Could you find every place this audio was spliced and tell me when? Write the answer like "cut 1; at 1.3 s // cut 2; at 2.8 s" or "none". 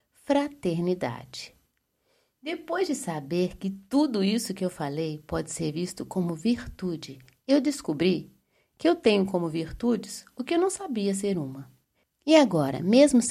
none